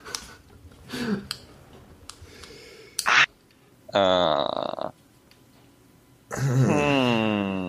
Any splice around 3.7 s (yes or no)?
yes